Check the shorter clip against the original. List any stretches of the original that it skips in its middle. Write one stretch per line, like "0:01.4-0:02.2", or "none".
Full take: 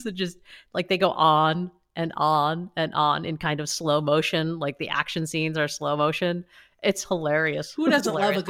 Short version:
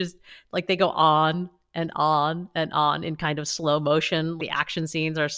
0:04.6-0:04.8

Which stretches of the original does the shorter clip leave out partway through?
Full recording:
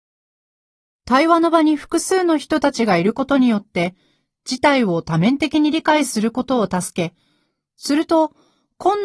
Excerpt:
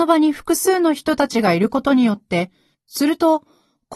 0:04.2-0:07.6

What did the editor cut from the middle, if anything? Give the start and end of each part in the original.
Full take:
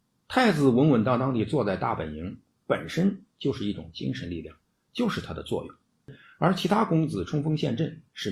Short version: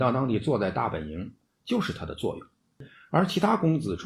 0:02.5-0:04.7

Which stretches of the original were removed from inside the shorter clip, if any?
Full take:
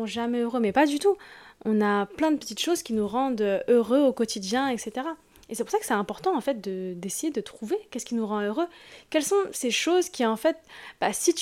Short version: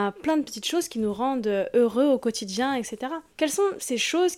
0:05.2-0:09.0

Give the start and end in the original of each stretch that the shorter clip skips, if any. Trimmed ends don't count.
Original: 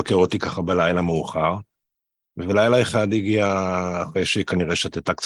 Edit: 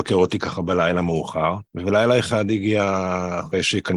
0:01.7-0:02.3

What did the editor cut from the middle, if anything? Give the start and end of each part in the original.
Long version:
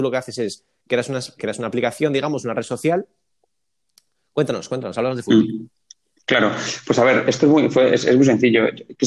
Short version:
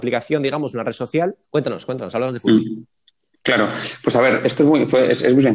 0:03.1-0:04.3

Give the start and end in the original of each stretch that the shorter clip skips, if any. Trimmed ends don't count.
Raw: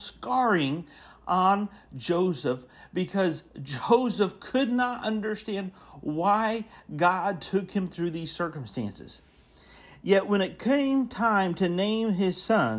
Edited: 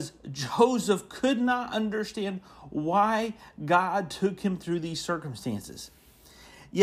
none

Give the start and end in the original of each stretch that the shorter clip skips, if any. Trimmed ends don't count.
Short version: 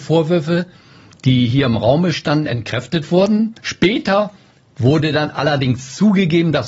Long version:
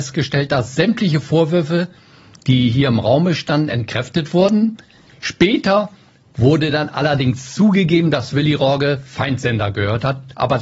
0:04.8-0:05.2

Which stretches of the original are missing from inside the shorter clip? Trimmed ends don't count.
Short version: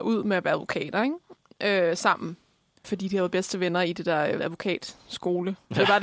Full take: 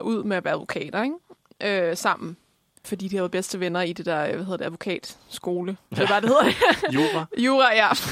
0:04.4-0:04.6

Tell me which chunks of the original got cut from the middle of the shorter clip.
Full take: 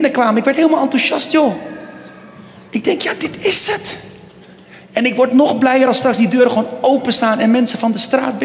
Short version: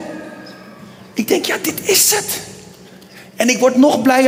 none

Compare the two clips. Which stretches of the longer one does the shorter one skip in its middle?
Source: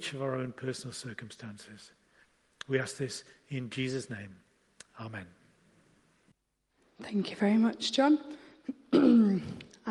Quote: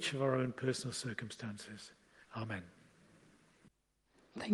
0:02.3-0:04.9

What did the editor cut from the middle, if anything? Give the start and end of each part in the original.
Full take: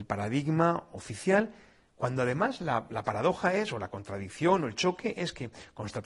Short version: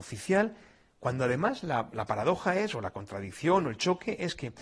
none

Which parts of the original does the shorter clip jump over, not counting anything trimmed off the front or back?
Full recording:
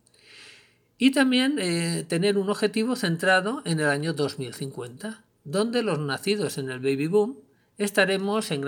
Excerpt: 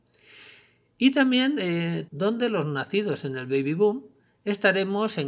0:02.1-0:05.4

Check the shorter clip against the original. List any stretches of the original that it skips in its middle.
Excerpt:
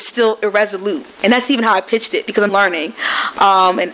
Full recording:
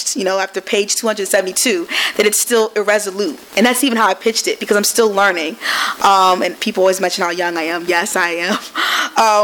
0:04.8-0:05.1

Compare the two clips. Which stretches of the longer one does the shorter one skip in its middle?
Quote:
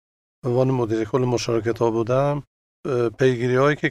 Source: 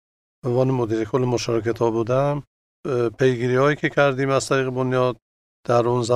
none

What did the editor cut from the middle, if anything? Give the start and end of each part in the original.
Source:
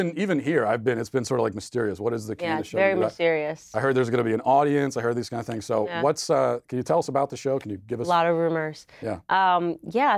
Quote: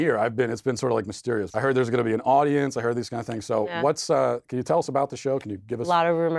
0:02.0-0:03.7

